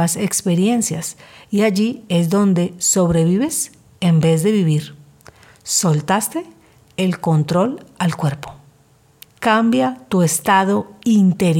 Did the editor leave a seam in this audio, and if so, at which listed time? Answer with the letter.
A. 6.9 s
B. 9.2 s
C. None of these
B